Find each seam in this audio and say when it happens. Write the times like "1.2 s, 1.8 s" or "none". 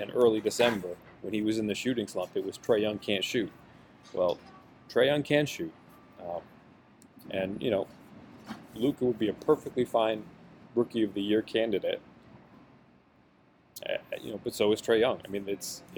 none